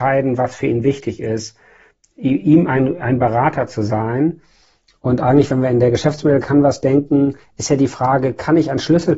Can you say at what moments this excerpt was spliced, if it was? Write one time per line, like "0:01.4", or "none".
none